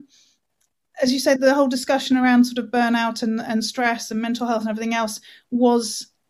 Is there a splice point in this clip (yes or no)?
yes